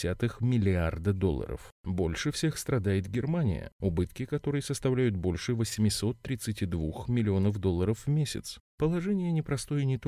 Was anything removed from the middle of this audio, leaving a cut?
yes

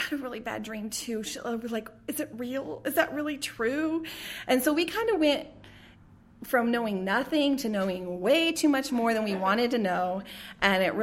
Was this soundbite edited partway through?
no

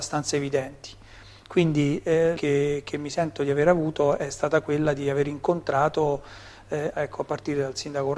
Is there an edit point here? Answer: yes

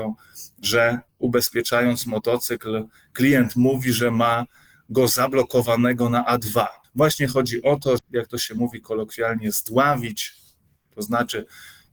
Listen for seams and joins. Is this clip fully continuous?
no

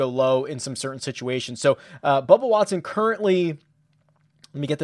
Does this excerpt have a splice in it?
no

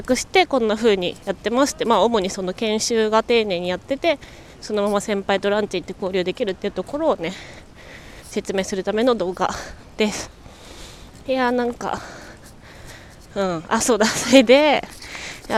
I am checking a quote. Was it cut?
no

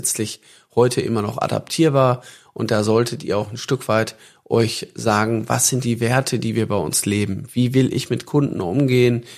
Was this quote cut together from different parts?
no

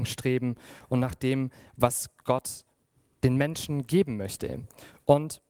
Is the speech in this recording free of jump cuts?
yes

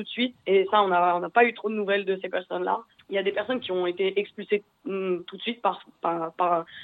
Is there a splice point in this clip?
yes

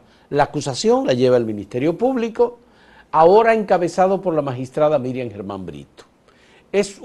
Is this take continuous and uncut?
yes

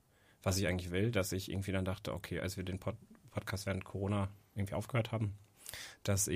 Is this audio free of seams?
yes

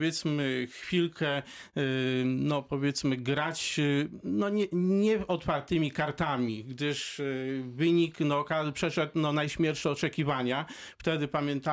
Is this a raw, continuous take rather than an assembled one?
yes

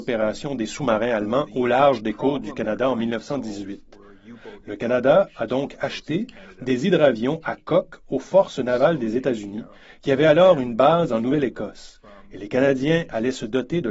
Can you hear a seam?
no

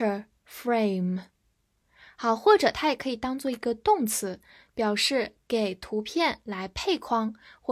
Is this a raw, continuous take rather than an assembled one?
yes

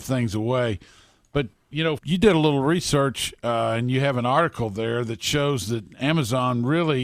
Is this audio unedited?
no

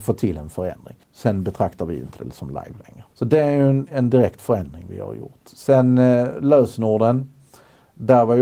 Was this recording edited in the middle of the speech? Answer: yes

